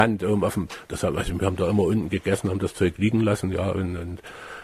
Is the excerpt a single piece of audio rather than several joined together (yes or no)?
yes